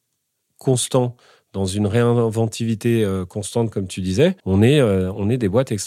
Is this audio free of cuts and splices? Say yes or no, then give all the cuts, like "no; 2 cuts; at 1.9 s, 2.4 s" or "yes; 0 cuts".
no; 1 cut; at 4.4 s